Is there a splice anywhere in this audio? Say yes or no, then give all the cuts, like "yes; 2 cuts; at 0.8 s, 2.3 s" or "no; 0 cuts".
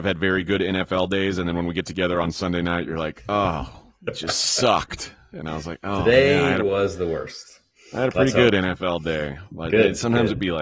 no; 0 cuts